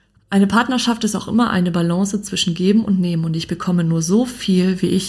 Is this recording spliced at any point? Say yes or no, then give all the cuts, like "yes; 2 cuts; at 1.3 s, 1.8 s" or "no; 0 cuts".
no; 0 cuts